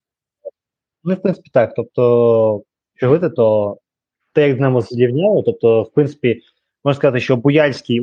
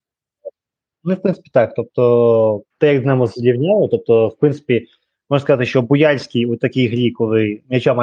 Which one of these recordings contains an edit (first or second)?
second